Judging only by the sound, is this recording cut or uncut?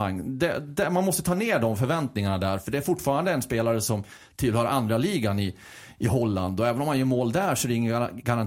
uncut